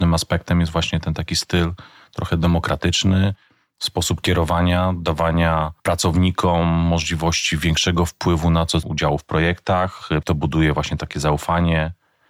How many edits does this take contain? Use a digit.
2